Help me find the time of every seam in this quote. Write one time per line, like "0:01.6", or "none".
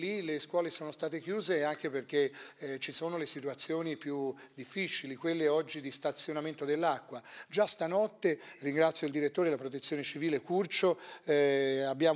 none

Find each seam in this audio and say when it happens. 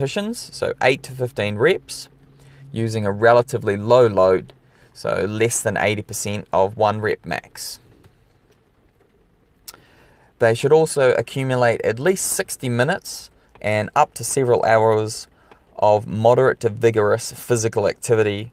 none

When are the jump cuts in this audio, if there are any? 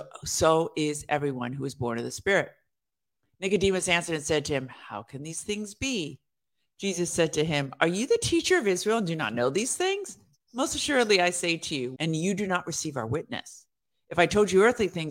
0:12.0

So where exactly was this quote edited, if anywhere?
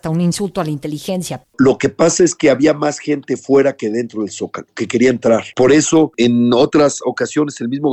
0:01.4

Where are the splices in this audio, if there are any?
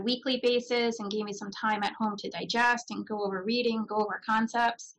none

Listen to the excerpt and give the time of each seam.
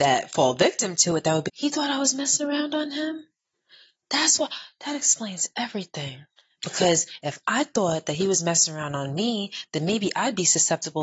0:01.5

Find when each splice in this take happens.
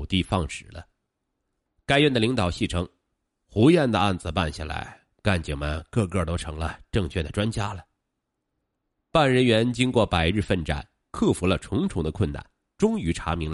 none

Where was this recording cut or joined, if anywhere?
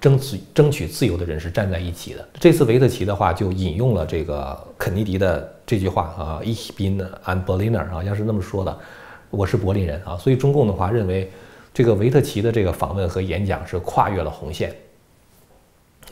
0:02.3
0:10.1

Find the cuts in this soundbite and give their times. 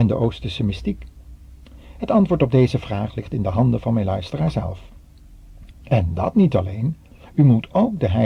0:05.7

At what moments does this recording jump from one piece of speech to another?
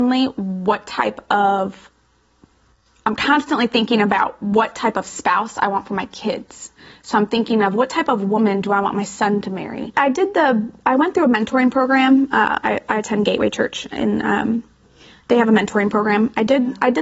0:09.9

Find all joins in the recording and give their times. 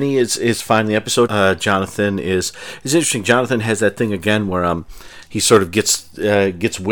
0:01.3

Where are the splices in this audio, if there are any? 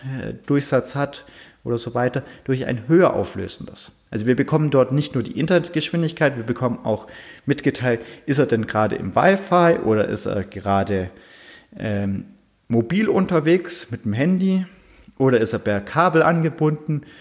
none

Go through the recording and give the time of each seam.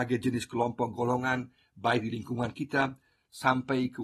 none

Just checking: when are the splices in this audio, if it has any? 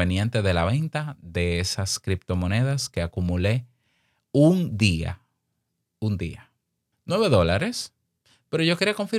0:06.9

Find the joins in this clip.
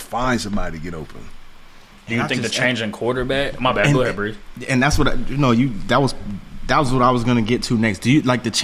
none

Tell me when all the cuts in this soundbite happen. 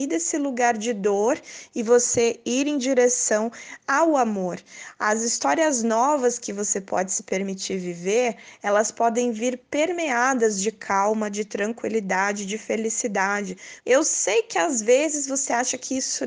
0:13.8

